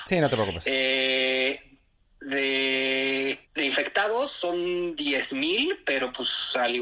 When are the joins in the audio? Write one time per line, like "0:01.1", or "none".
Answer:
0:03.4